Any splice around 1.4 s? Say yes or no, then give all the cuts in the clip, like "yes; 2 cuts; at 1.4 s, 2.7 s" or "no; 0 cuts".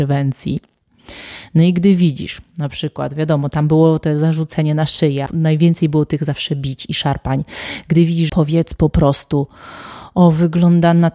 no; 2 cuts; at 5.3 s, 8.3 s